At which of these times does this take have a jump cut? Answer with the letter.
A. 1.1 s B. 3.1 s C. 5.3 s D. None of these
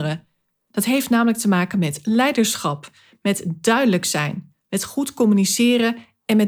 B